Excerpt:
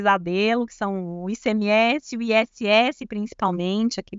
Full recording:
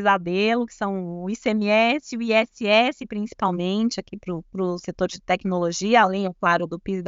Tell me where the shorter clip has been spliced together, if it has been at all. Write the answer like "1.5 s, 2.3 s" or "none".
none